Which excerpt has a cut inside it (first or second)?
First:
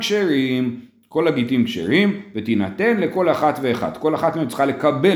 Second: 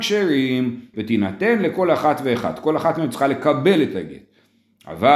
second